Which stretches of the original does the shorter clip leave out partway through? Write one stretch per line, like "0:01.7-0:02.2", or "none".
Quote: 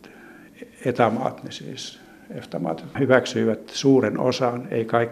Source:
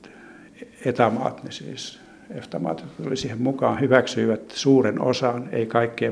0:03.0-0:03.8